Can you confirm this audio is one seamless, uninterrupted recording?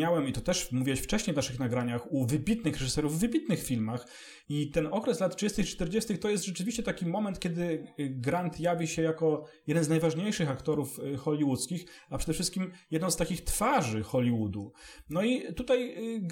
no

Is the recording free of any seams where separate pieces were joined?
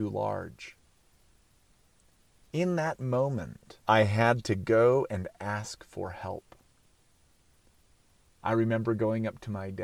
no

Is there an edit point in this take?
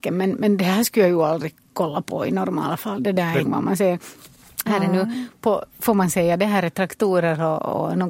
yes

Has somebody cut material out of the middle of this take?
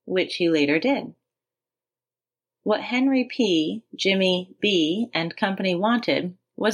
no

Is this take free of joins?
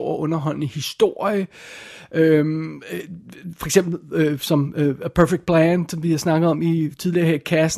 yes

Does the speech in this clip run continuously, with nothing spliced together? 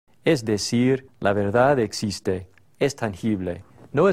no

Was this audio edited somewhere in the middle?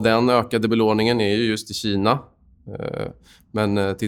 no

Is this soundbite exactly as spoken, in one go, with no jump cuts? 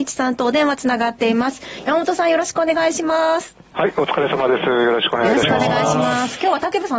yes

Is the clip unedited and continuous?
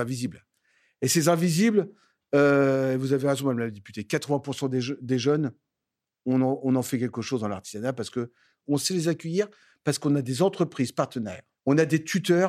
yes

